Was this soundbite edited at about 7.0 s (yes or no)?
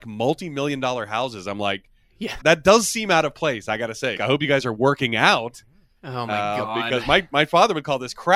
no